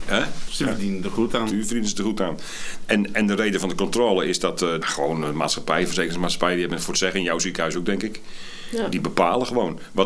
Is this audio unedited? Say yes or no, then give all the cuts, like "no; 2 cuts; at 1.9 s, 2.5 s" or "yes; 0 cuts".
no; 1 cut; at 4.8 s